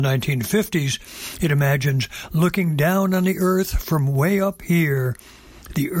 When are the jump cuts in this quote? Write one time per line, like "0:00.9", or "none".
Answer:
none